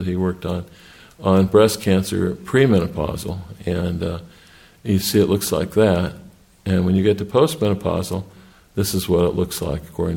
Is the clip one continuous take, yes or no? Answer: yes